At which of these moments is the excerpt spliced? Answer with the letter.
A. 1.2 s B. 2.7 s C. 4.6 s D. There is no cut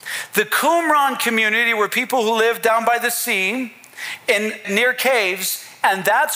C